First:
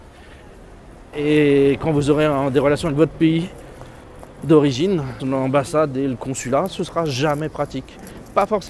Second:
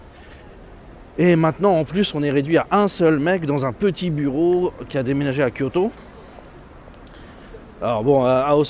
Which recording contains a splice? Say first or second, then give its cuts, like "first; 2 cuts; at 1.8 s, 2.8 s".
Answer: first; 2 cuts; at 1.1 s, 5.2 s